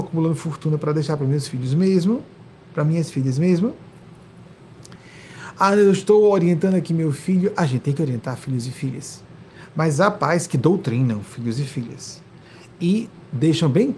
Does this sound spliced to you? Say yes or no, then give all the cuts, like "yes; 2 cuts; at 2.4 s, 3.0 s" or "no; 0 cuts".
no; 0 cuts